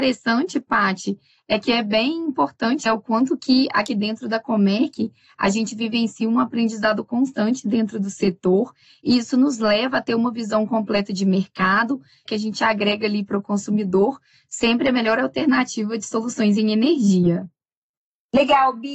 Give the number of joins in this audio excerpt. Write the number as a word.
two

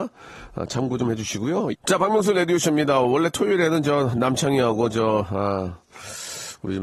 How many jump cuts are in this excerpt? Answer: one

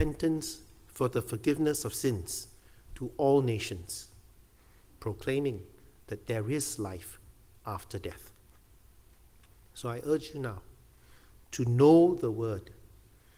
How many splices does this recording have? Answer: zero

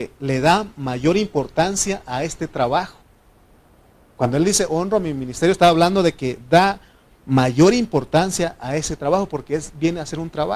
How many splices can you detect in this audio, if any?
zero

